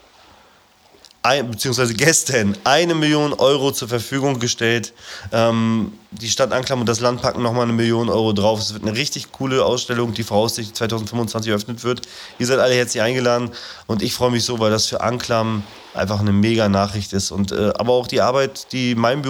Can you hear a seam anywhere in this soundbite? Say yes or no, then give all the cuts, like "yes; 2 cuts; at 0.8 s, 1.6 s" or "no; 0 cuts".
no; 0 cuts